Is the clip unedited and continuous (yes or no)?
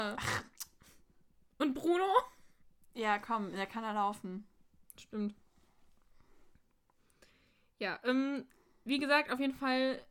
yes